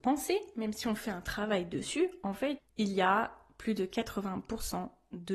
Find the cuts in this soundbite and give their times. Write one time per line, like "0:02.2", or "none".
0:02.6